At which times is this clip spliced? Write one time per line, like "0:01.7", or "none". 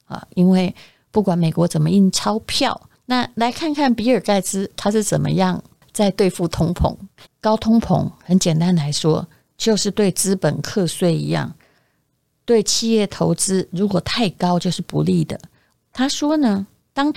0:02.9
0:07.3
0:15.8